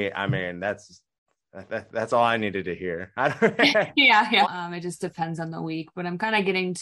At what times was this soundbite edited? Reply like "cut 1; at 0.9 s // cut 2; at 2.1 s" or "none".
cut 1; at 4.4 s